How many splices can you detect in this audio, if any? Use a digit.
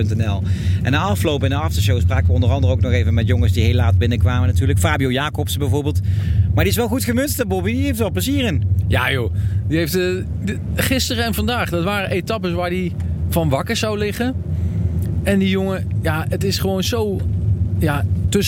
0